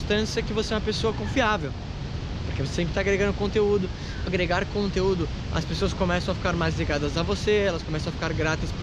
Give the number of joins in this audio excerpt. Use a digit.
1